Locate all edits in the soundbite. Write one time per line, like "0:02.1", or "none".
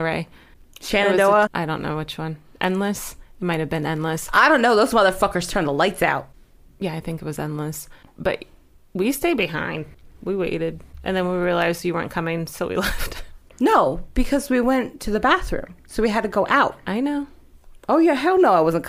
0:01.5